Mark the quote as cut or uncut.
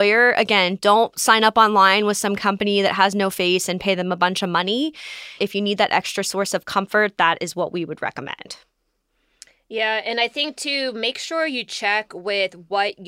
cut